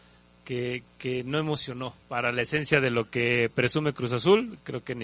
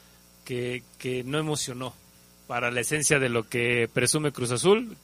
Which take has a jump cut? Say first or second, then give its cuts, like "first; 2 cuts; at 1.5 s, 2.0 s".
first; 1 cut; at 2.0 s